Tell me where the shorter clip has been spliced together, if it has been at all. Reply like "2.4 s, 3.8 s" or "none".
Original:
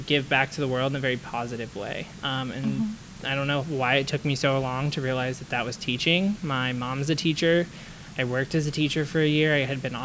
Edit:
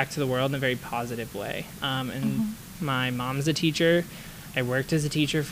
2.8 s